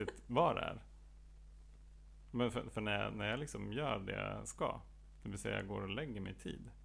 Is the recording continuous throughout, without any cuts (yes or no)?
yes